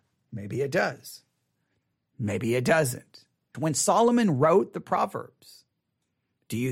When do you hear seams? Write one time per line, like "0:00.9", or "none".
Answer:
0:03.5